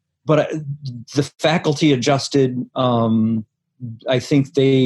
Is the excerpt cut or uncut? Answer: uncut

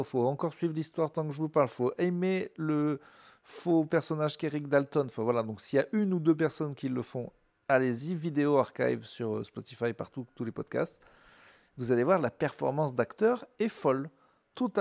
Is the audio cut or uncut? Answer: uncut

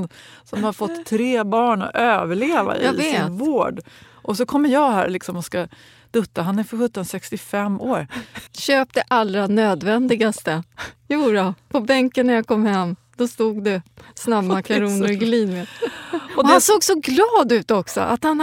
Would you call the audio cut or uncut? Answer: cut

